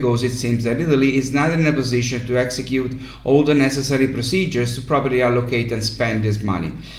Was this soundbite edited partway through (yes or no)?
no